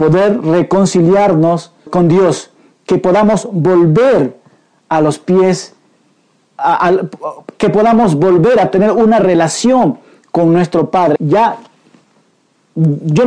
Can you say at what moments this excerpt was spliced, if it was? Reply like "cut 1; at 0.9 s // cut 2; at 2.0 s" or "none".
cut 1; at 1.9 s // cut 2; at 11.2 s